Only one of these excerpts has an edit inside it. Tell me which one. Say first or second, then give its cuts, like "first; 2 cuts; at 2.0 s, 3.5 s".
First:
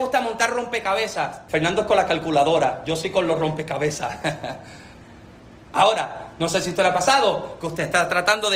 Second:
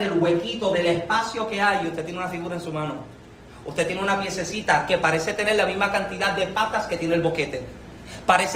first; 1 cut; at 1.5 s